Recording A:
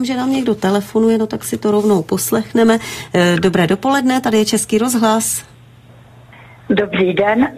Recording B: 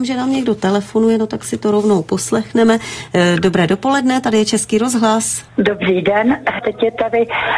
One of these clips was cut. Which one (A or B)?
B